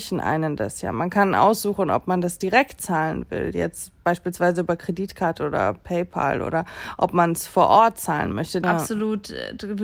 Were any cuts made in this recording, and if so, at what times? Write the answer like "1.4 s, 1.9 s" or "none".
8.6 s